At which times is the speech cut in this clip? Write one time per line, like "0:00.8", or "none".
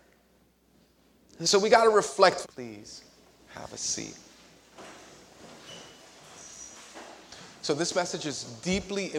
0:02.4